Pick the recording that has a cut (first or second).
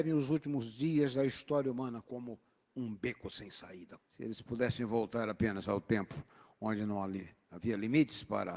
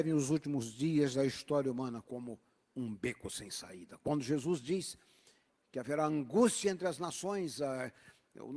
first